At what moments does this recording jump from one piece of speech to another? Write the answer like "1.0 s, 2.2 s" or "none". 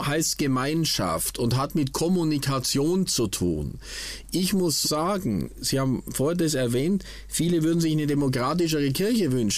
4.8 s